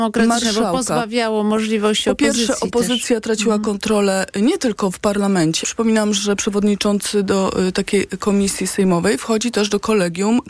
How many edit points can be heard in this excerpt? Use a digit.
1